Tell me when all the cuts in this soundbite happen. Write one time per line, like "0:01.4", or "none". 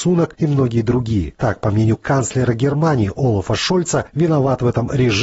0:04.1